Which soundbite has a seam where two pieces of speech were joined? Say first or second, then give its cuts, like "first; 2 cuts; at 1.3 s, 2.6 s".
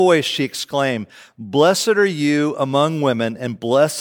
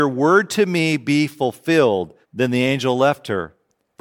second; 1 cut; at 2.2 s